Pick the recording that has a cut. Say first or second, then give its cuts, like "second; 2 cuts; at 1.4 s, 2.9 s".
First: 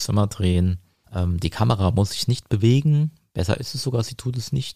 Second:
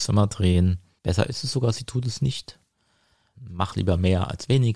second; 2 cuts; at 1.0 s, 3.3 s